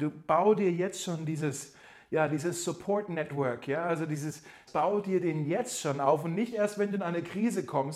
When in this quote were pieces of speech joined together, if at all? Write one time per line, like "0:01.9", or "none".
0:04.7